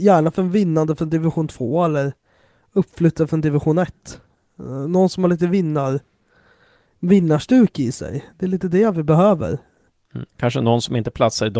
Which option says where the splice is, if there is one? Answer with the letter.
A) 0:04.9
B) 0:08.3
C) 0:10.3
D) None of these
D